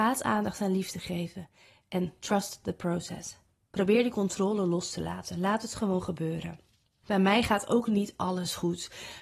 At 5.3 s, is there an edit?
no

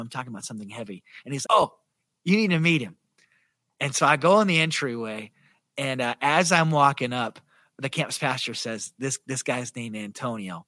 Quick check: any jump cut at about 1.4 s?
yes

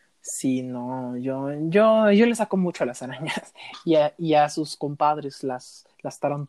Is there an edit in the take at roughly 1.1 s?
no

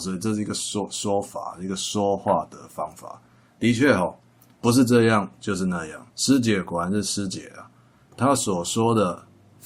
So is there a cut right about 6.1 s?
yes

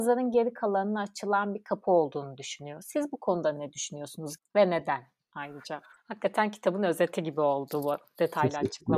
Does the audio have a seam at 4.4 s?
yes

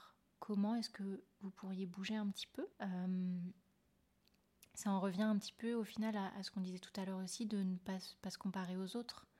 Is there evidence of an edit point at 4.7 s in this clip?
no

